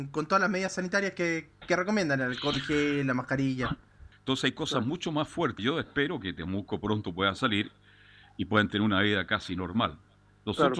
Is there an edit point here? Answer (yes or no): yes